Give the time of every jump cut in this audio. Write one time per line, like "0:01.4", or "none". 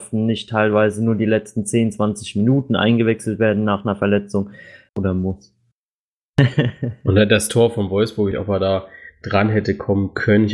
0:04.9
0:08.3

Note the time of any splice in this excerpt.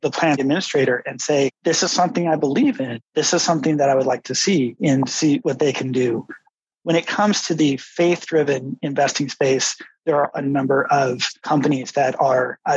none

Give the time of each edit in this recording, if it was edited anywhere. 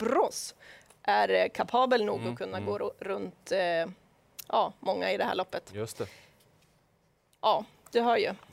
none

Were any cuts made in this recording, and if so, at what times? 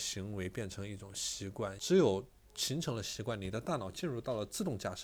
0:01.8

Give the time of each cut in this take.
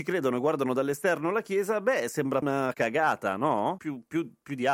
0:02.4

